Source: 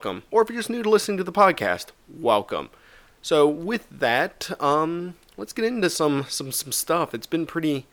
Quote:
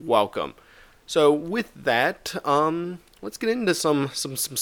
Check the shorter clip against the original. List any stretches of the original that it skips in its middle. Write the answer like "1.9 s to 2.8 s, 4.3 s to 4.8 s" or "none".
none